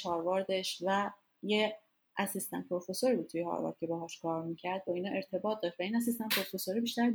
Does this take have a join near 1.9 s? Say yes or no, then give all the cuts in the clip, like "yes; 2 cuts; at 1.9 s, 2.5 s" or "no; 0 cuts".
no; 0 cuts